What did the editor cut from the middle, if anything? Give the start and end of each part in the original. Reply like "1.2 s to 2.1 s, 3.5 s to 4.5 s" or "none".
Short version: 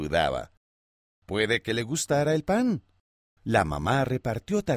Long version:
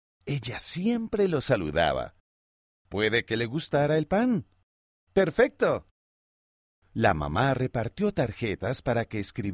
5.0 s to 6.9 s